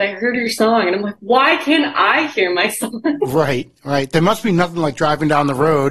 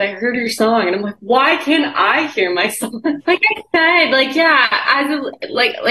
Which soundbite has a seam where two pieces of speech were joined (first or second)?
second